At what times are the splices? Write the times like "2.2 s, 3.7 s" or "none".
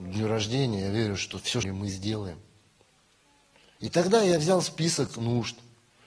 1.6 s